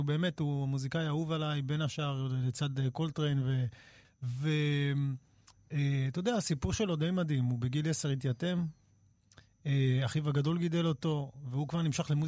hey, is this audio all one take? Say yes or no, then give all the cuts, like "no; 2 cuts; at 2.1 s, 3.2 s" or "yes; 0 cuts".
no; 1 cut; at 4.0 s